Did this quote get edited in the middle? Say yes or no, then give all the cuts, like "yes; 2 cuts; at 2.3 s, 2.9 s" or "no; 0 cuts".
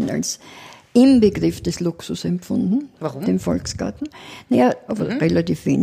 yes; 1 cut; at 4.9 s